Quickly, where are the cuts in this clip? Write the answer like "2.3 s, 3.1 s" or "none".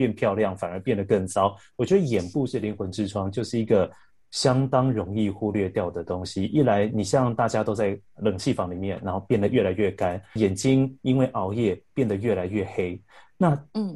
10.4 s